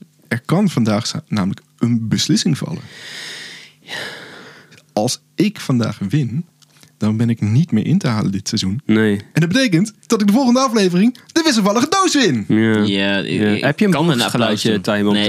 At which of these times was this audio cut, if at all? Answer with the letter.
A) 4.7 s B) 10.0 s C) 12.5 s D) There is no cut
B